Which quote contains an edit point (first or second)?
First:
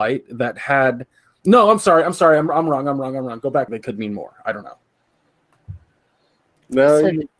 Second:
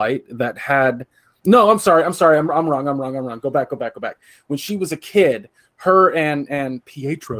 first